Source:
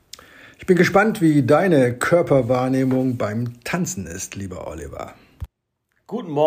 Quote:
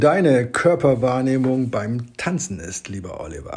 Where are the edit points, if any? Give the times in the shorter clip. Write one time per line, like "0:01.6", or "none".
none